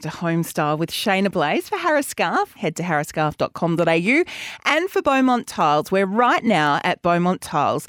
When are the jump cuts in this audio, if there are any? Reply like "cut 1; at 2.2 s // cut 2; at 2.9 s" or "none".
cut 1; at 2.6 s